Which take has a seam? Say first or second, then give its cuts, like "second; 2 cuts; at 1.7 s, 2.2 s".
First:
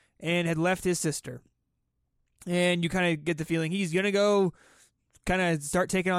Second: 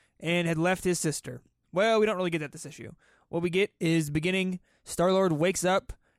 second; 1 cut; at 1.6 s